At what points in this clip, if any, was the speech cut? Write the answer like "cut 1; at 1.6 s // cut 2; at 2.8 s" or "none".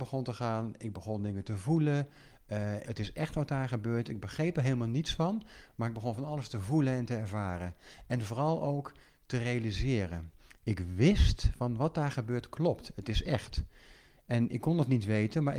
cut 1; at 2.8 s